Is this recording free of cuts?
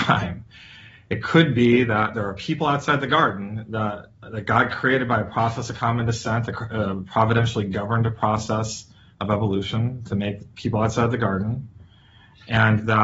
yes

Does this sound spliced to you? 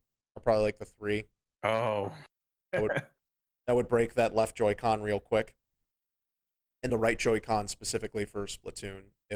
yes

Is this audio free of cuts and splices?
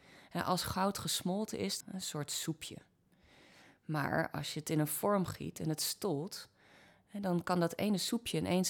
no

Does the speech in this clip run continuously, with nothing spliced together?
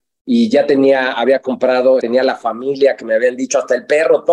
no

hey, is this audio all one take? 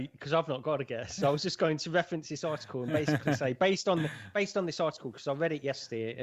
yes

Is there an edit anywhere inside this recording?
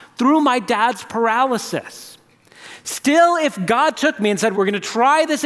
yes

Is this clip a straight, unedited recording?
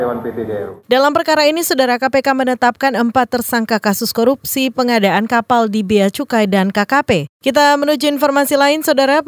no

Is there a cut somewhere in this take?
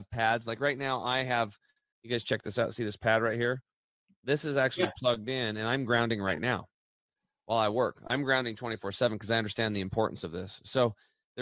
no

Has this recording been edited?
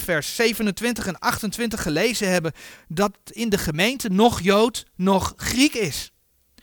no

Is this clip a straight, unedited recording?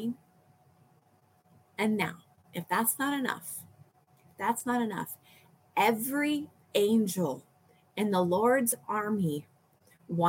yes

